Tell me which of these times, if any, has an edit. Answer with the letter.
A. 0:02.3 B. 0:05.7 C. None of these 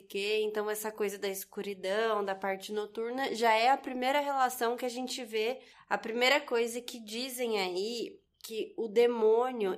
B